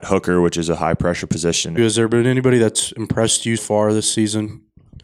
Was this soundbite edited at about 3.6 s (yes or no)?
yes